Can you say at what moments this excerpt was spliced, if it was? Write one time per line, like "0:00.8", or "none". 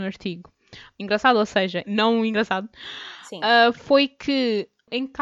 0:01.8